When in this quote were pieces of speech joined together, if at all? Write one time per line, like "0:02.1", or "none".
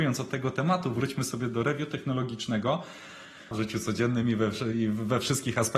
0:03.5